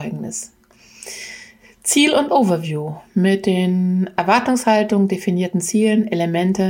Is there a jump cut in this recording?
no; 0 cuts

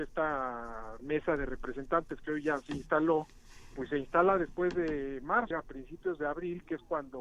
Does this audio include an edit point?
yes; 1 cut; at 5.5 s

